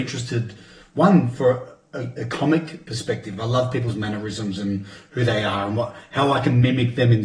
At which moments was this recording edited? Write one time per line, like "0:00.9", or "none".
none